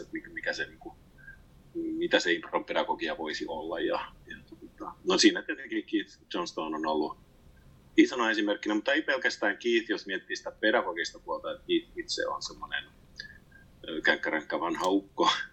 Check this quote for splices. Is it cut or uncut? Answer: uncut